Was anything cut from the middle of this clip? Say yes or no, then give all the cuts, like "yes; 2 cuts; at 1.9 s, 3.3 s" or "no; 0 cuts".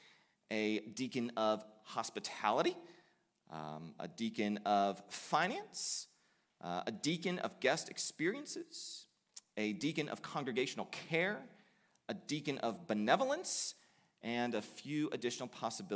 no; 0 cuts